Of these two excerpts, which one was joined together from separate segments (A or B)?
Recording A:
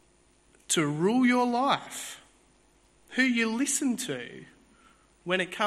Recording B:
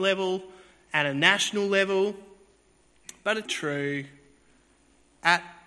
B